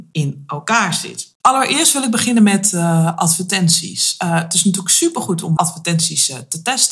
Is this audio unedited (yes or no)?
no